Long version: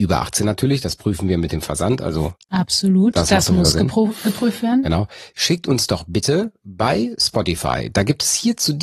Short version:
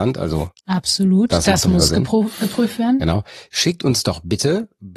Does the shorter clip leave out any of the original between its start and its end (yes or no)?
no